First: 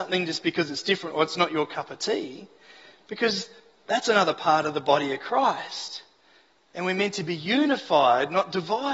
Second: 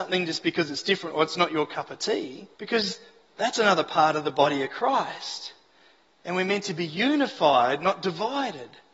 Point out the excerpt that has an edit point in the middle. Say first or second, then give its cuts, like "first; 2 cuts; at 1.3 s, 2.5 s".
second; 1 cut; at 2.5 s